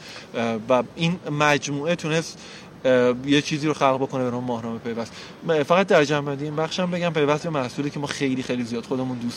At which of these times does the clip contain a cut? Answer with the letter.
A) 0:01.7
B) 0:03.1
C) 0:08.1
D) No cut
D